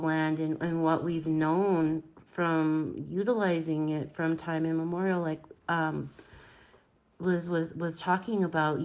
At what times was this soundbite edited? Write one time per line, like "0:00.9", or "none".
none